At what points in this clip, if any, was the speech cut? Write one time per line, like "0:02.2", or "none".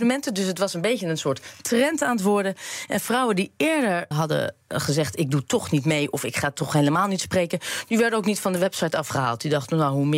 0:04.1